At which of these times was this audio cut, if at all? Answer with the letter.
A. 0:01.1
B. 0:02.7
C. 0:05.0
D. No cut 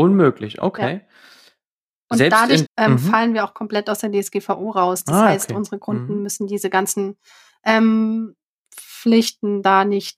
B